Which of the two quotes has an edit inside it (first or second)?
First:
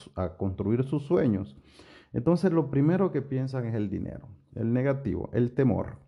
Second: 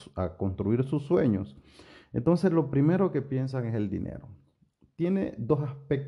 first